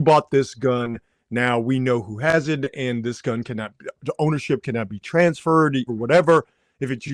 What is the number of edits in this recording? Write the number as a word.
one